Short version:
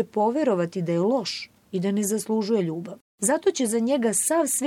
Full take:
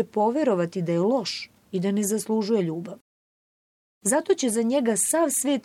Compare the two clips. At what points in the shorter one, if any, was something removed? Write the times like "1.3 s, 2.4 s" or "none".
3.1 s